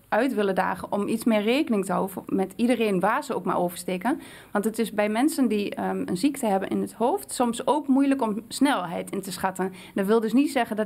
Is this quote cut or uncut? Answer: uncut